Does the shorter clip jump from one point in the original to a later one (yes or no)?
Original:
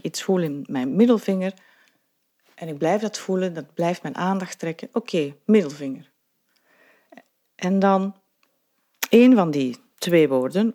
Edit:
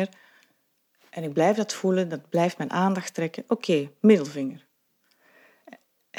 no